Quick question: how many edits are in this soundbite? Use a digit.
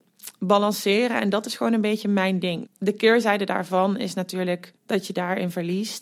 2